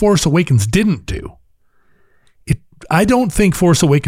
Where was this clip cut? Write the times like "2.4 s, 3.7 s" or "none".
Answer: none